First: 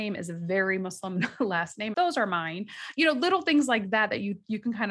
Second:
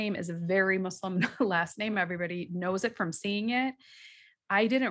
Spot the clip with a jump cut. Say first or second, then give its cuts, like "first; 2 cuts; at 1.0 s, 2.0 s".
first; 1 cut; at 1.9 s